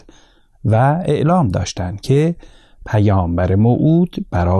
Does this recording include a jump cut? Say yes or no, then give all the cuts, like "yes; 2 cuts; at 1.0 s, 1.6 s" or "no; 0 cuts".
no; 0 cuts